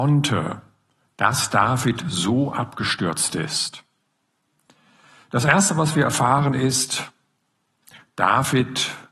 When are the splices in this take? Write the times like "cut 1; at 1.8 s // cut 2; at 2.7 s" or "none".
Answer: none